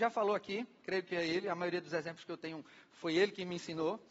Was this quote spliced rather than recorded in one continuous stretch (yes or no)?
no